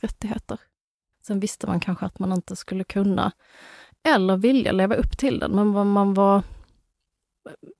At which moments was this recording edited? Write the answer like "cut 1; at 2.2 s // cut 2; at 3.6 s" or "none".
cut 1; at 1.1 s